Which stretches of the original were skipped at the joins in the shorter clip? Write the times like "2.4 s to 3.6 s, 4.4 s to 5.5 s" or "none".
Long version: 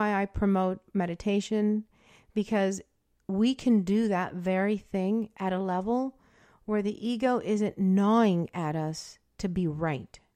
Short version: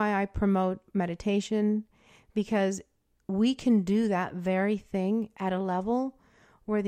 none